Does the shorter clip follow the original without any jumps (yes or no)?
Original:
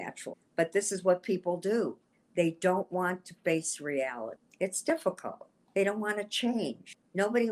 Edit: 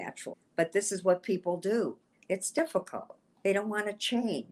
no